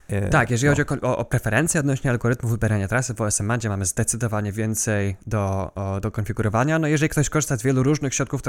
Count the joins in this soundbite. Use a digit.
0